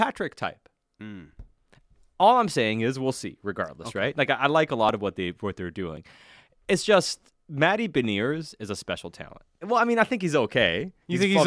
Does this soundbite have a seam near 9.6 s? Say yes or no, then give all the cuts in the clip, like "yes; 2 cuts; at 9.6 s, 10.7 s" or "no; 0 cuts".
yes; 1 cut; at 9.6 s